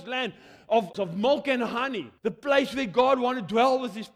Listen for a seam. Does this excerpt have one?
yes; 2 cuts; at 0.9 s, 2.2 s

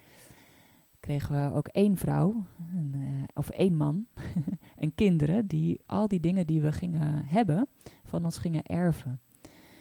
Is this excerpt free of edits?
yes; 0 cuts

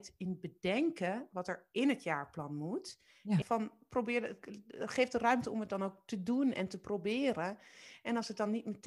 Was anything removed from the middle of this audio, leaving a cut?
yes; 1 cut; at 3.4 s

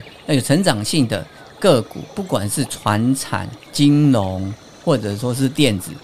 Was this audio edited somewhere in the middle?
yes; 1 cut; at 3.7 s

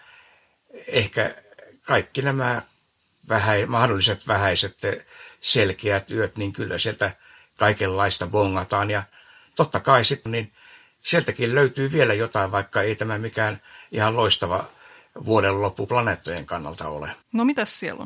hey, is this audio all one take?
no; 1 cut; at 10.3 s

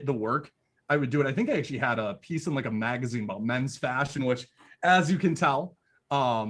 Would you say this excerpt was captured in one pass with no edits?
yes; 0 cuts

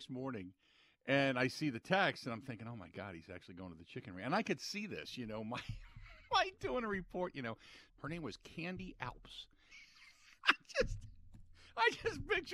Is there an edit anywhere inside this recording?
yes; 2 cuts; at 7.9 s, 9.7 s

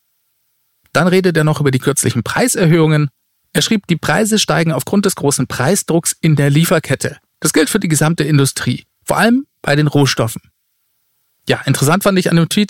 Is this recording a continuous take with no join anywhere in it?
yes; 0 cuts

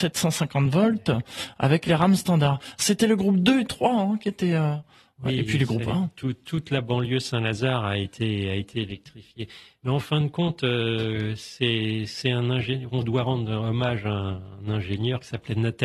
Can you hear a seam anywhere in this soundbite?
no; 0 cuts

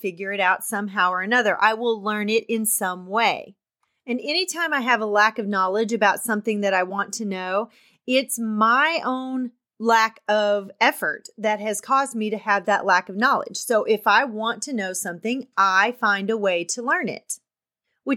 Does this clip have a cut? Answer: no; 0 cuts

